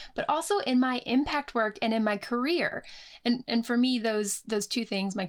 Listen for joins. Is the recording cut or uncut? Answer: uncut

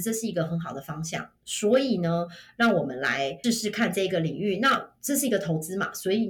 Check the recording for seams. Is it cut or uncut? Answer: cut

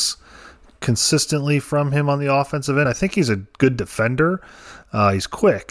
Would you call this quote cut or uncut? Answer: uncut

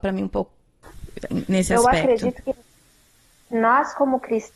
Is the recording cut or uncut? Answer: uncut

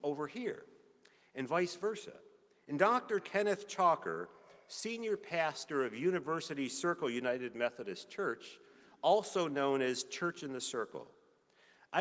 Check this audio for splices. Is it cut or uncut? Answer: cut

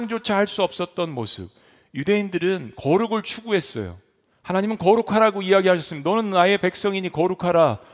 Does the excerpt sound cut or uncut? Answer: uncut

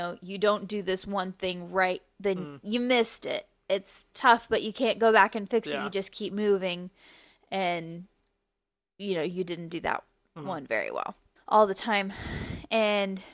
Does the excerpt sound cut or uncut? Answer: cut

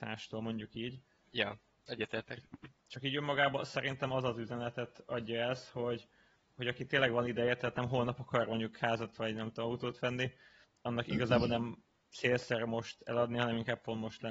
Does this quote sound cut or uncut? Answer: cut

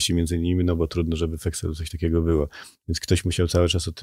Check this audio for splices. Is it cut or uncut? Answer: uncut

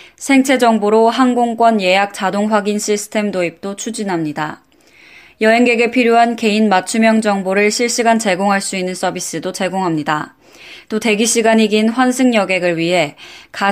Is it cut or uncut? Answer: uncut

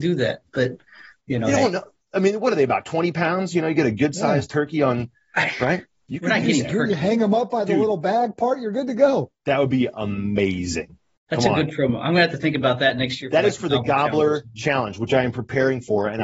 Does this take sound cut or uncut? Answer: uncut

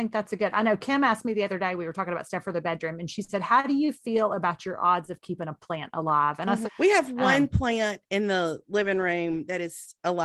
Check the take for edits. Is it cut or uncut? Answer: cut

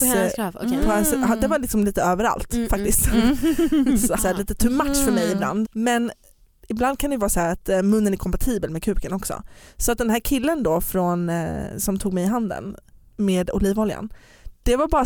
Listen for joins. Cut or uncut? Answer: cut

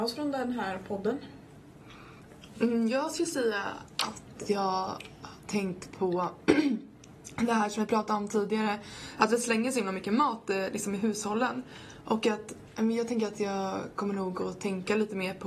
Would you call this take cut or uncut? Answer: uncut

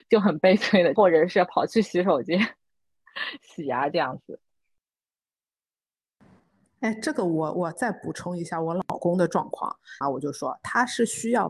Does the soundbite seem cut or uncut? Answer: cut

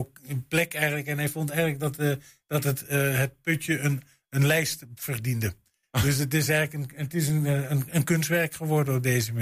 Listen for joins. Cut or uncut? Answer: uncut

